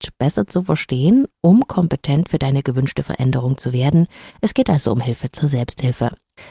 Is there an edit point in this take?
no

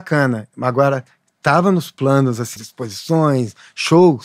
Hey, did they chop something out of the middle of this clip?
yes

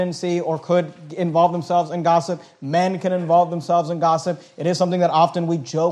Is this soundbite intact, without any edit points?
yes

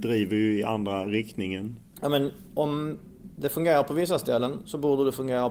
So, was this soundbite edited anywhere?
yes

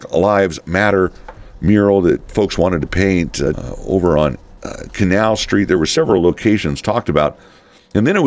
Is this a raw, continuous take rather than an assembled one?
no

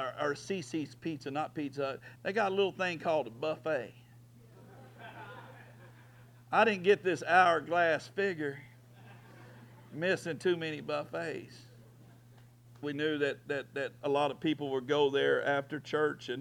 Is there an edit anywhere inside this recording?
yes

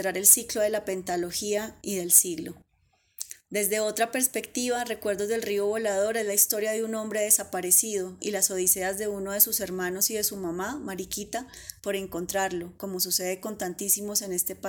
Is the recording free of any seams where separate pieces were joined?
no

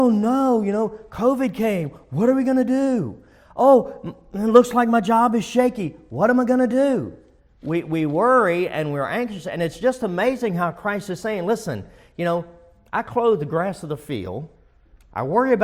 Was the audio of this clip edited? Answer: no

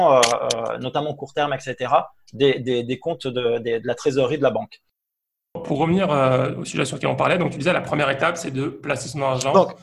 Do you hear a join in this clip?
no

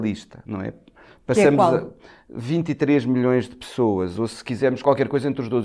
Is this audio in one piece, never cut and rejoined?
yes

